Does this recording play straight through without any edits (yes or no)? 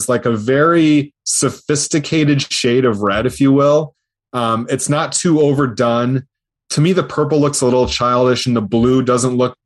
yes